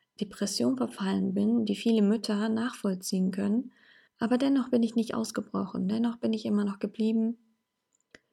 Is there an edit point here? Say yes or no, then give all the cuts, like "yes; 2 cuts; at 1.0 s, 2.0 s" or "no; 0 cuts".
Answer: yes; 1 cut; at 4.1 s